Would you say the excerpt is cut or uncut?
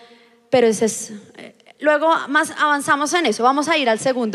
uncut